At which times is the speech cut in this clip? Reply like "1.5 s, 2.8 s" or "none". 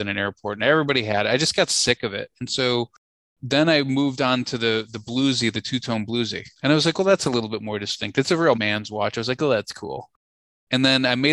6.5 s, 8.5 s